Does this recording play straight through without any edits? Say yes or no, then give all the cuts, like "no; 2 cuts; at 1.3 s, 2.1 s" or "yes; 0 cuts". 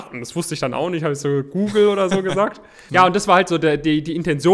no; 1 cut; at 2.9 s